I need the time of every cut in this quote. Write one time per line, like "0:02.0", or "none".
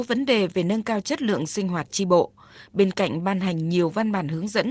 none